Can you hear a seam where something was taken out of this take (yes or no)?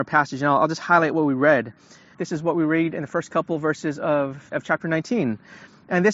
yes